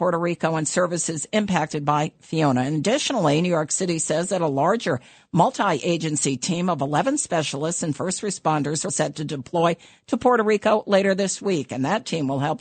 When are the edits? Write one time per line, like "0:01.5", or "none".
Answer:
0:08.9

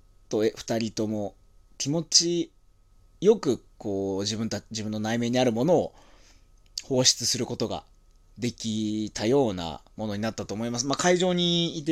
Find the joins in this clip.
none

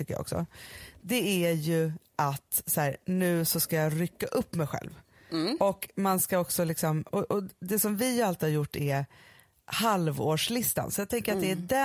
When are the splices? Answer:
none

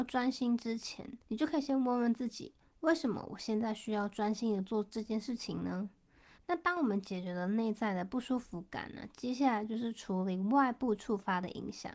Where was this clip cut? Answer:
0:06.4

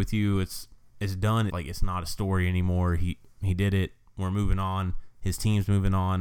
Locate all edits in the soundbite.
0:01.5

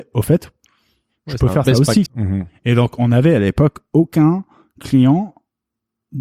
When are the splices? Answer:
0:02.1

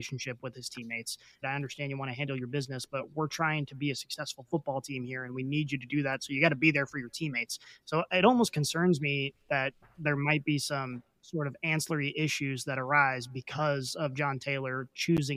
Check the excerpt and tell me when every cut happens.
0:01.4

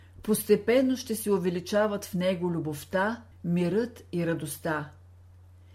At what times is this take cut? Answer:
0:03.3

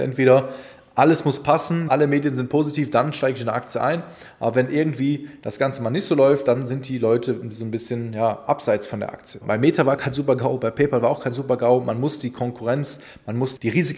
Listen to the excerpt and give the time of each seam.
0:09.4

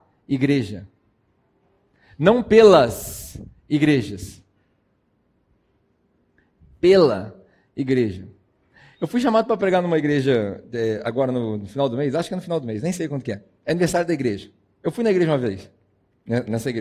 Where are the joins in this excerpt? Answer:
none

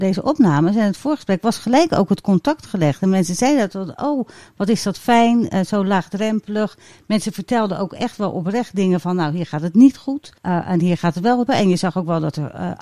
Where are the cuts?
0:10.4
0:11.5

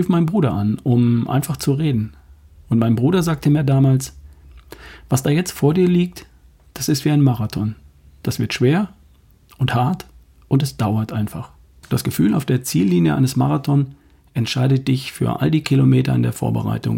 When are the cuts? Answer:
0:11.8

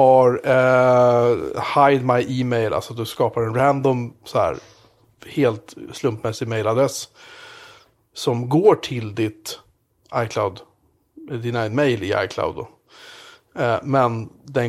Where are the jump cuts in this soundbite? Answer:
none

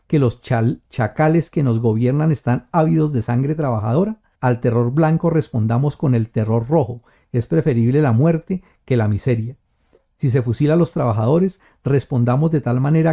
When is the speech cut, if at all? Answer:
0:04.3

